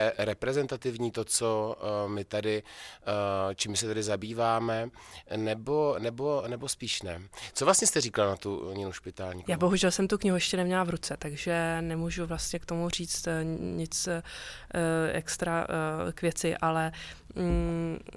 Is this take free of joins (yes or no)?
yes